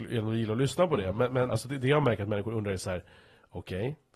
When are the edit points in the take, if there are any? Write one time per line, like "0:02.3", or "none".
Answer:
0:01.5